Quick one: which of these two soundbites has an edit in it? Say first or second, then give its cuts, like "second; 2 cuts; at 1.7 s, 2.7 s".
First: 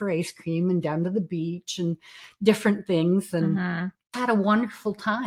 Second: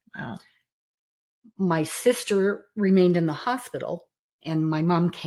first; 1 cut; at 4.1 s